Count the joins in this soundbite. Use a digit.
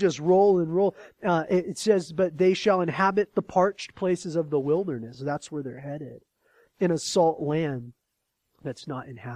0